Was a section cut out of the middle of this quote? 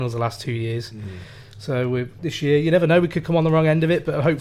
no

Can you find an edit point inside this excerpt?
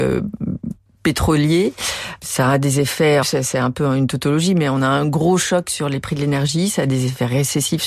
yes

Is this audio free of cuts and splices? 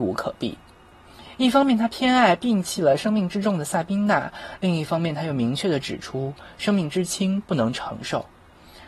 yes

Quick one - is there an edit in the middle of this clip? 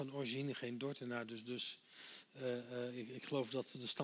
no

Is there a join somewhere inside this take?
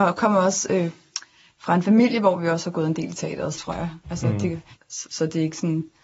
yes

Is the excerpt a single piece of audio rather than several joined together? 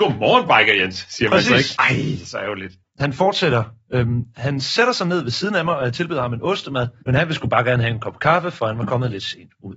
no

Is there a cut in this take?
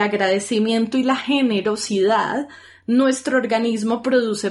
no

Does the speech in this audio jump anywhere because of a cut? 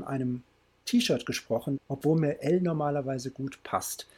yes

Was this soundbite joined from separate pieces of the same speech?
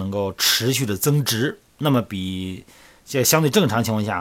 no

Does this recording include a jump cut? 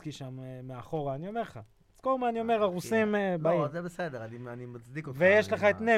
no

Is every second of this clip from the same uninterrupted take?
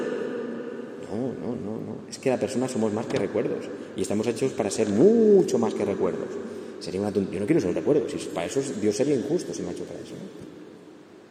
no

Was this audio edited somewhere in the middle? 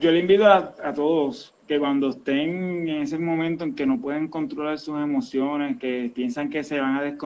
no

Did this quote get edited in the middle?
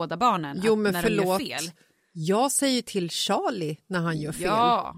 no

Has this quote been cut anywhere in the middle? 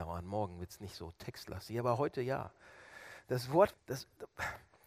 yes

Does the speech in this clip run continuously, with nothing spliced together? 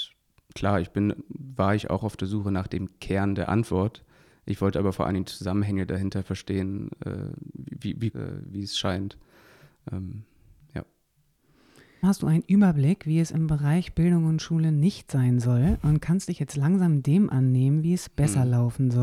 no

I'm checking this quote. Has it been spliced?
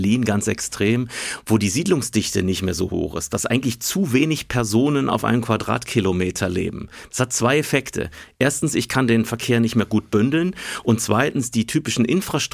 no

